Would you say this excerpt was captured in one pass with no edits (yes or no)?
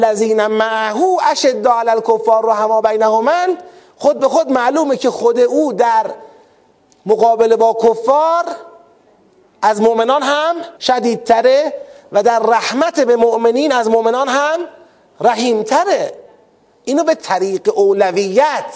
no